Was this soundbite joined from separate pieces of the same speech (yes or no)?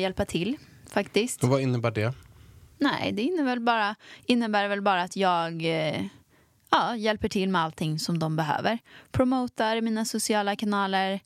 no